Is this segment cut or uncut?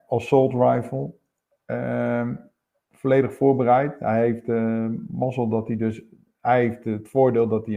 uncut